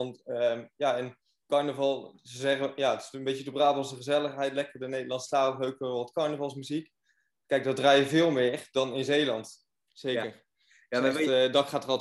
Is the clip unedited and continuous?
no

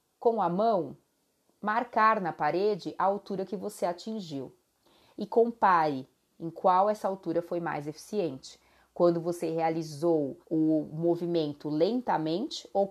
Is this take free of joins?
no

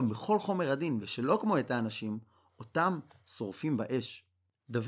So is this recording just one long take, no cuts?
yes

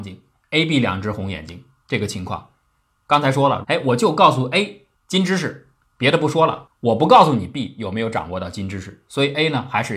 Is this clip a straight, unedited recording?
no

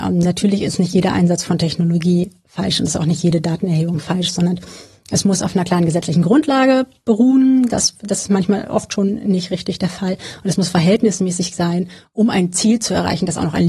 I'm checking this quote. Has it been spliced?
no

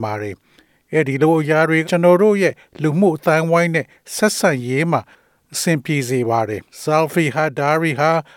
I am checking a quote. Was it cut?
yes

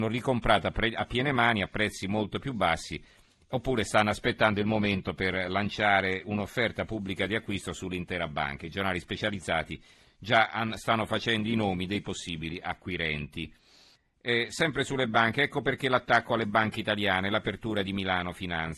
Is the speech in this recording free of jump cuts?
yes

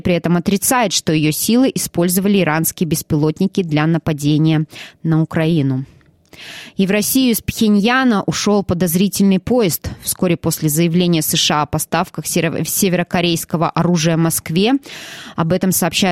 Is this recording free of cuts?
yes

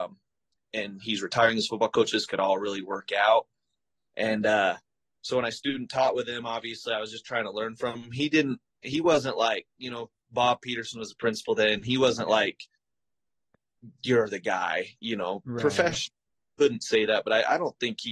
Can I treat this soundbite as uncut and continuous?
yes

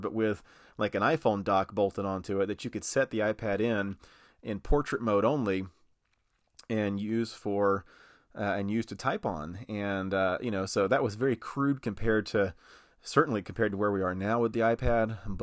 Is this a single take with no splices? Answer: yes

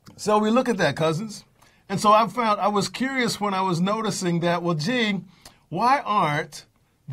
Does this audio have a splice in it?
no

